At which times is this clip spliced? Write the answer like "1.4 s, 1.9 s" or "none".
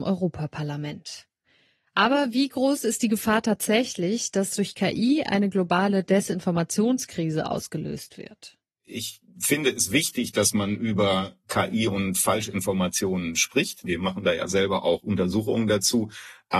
13.8 s